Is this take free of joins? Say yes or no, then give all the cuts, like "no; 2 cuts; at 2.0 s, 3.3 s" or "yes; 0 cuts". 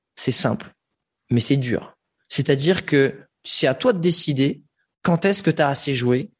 yes; 0 cuts